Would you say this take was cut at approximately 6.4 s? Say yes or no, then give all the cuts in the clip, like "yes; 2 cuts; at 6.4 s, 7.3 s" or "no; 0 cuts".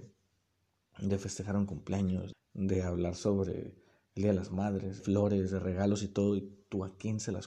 no; 2 cuts; at 2.3 s, 5.0 s